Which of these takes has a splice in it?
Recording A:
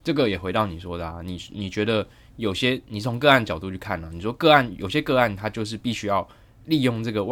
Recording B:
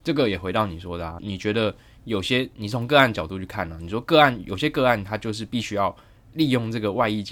B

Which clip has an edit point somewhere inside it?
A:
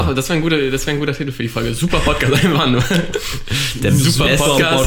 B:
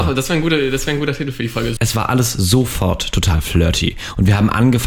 B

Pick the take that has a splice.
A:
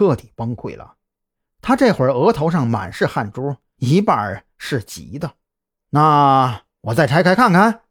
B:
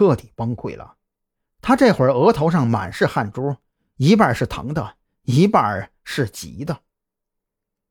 A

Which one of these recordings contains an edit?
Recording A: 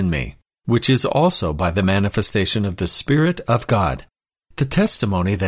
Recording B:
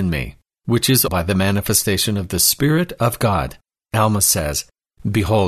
B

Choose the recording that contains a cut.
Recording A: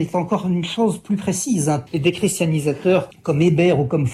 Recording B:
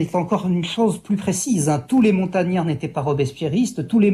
A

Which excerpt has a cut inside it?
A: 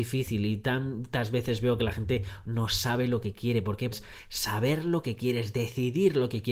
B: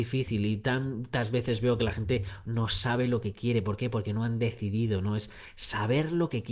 A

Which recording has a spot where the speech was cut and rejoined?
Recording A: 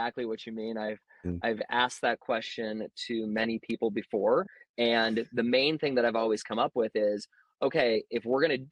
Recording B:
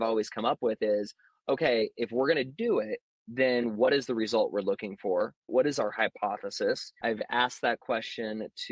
B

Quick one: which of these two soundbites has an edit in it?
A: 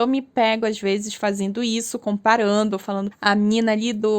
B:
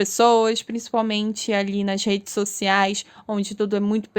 A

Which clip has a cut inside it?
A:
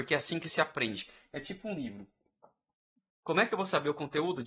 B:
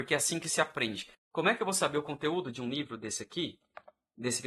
B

